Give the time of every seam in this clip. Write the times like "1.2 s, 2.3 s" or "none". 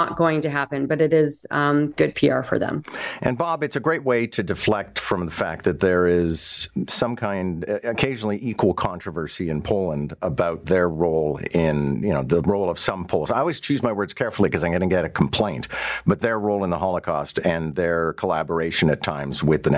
none